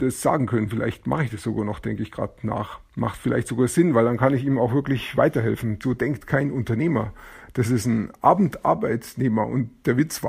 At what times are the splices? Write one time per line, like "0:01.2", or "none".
0:02.9
0:05.8

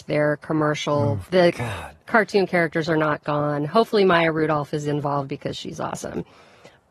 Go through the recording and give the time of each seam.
0:01.2

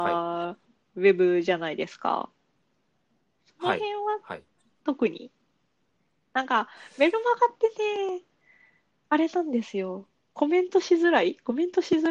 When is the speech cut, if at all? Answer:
none

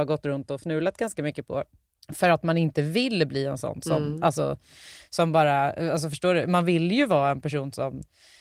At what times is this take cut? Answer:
none

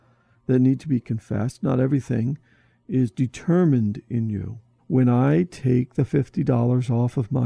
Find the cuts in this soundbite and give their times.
0:04.8

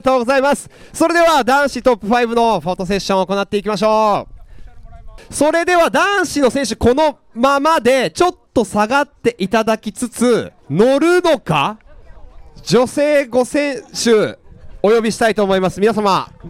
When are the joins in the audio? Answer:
0:10.6

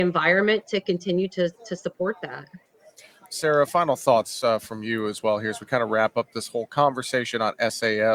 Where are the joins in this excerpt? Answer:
none

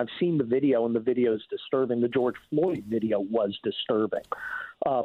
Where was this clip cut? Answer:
none

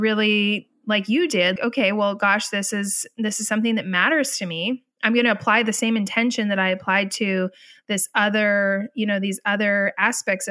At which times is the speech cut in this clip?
0:01.6

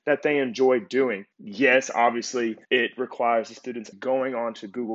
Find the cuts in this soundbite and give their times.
0:01.3
0:02.6
0:03.9

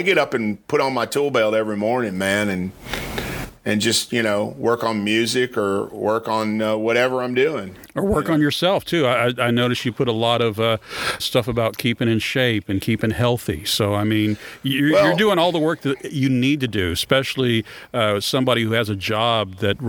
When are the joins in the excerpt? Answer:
0:11.2

